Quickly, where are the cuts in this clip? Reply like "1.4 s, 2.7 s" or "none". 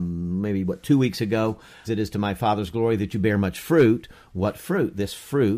1.8 s